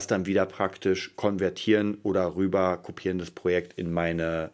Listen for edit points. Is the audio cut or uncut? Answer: uncut